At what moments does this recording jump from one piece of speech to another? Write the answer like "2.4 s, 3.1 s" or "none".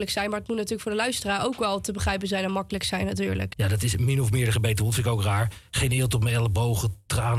3.5 s